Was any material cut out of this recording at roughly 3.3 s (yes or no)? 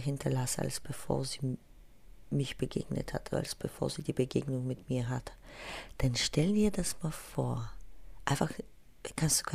yes